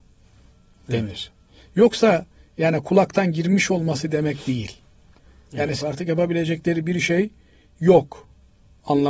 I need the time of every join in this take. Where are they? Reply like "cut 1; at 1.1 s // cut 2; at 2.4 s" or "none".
cut 1; at 1.6 s // cut 2; at 5.8 s